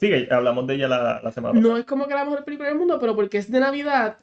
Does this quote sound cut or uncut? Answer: uncut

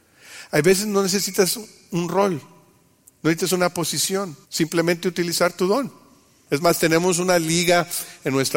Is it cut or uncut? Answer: cut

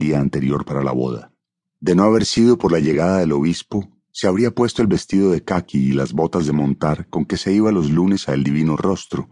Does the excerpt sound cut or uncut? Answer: cut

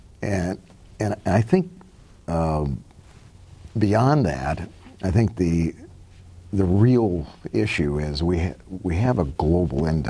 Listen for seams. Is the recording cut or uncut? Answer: uncut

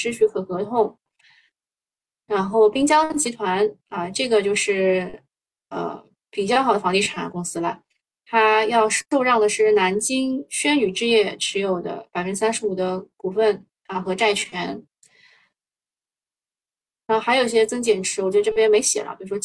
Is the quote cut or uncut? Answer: uncut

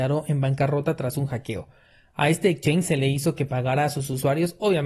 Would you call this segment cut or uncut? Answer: uncut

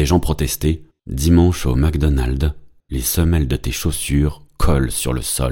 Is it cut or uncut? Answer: cut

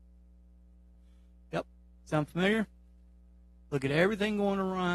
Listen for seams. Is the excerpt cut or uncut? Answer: uncut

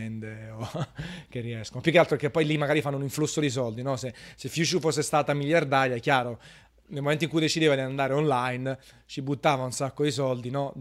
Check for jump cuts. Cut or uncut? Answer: uncut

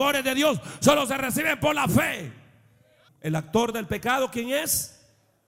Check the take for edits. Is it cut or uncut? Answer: cut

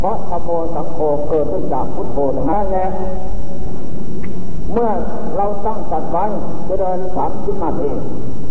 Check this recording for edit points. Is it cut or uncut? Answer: cut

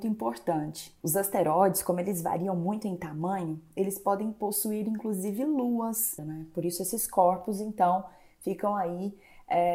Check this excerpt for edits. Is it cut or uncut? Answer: cut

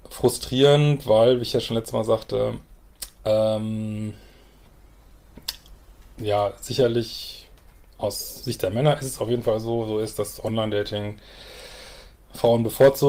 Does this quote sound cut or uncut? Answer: uncut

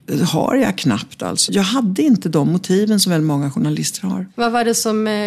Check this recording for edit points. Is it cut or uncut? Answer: cut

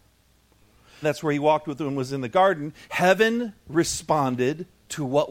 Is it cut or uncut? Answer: cut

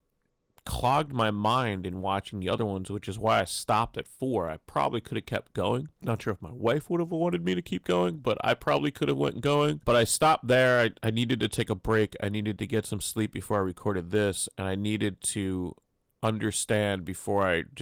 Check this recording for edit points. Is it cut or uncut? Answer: uncut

